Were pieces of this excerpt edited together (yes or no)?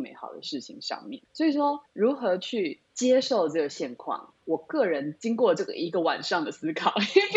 no